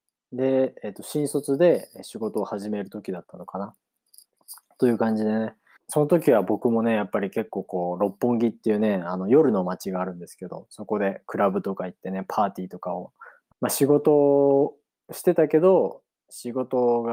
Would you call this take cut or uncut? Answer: cut